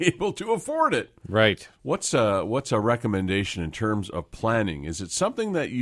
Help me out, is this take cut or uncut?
cut